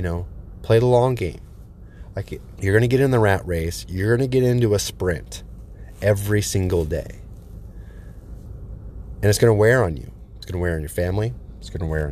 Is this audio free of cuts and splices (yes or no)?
no